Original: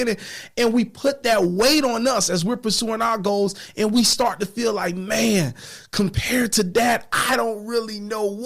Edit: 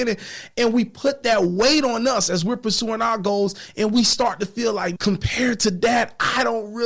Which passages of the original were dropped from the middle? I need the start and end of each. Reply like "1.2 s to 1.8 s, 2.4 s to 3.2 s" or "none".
5.0 s to 5.9 s